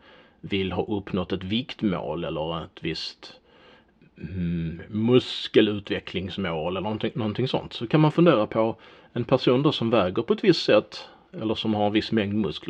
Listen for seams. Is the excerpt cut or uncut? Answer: uncut